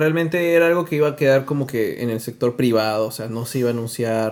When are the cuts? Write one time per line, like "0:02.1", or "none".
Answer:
none